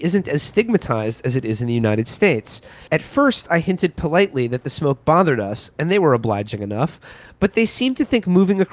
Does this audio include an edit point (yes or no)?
yes